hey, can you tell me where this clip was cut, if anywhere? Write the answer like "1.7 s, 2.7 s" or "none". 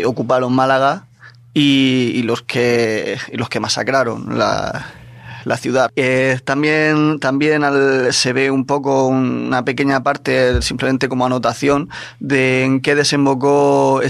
5.9 s, 8.1 s